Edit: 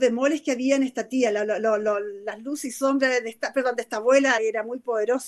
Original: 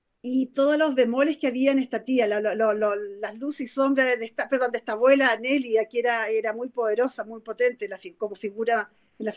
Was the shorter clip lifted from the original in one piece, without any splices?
no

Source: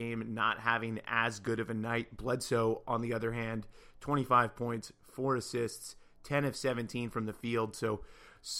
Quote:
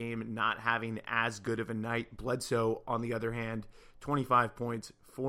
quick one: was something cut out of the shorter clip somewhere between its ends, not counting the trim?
no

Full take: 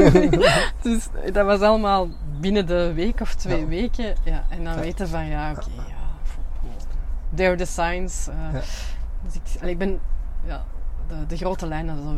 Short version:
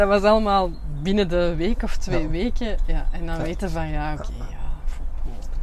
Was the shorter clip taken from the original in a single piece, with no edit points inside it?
yes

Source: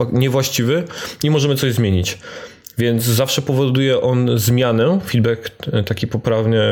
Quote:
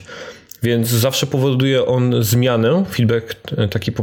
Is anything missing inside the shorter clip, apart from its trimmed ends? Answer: no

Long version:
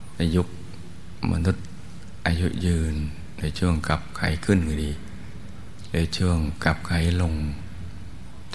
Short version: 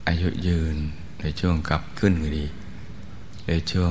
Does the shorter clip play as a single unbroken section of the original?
no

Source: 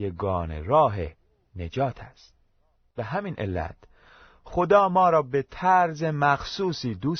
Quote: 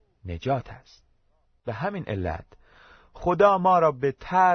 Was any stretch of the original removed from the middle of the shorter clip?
no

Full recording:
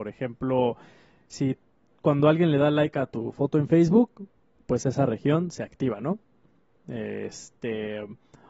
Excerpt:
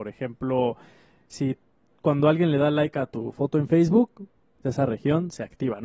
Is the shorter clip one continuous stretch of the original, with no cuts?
no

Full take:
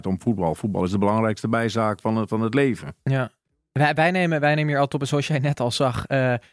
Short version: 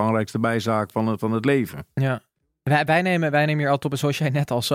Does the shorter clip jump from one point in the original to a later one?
no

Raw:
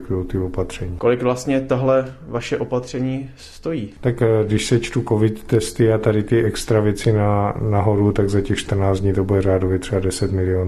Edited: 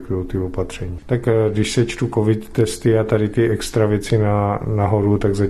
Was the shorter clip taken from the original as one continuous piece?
no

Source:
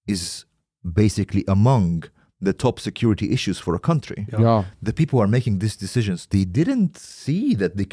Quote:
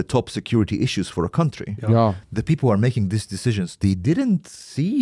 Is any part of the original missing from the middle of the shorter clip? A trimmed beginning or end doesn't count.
no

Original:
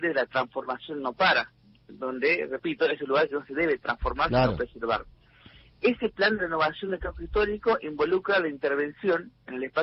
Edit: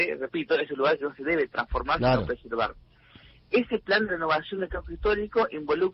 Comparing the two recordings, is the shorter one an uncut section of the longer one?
yes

